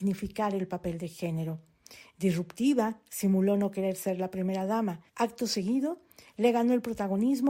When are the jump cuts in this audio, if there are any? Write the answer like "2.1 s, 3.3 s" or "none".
5.1 s